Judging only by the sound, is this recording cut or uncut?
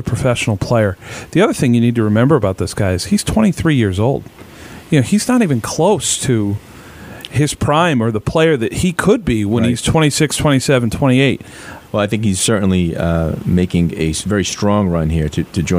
cut